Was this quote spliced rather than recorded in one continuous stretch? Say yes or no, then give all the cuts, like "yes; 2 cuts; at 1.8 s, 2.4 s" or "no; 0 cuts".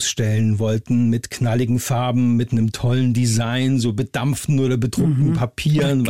no; 0 cuts